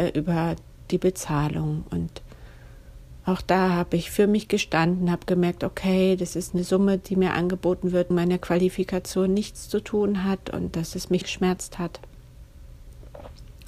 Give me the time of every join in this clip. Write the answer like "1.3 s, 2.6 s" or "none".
8.1 s, 11.2 s